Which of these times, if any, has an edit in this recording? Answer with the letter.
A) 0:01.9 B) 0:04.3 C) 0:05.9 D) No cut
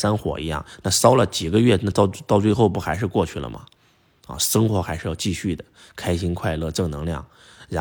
D